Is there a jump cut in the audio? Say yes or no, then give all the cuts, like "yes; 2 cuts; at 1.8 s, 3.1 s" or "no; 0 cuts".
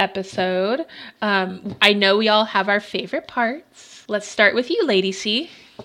no; 0 cuts